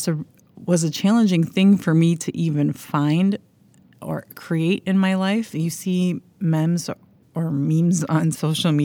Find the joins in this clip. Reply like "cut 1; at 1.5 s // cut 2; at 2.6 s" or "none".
cut 1; at 5.5 s